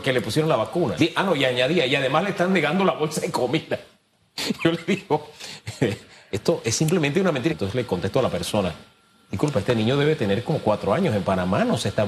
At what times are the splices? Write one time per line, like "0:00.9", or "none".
0:01.0
0:07.5